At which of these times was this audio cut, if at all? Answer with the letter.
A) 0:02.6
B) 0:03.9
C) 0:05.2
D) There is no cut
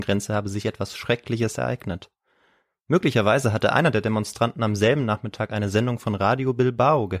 D